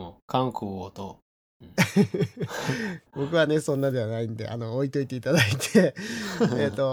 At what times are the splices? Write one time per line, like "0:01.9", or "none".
0:03.1